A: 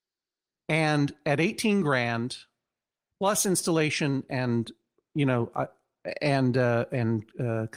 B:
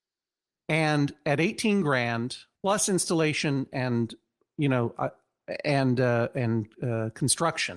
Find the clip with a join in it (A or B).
B